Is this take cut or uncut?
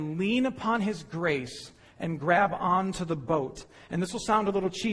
uncut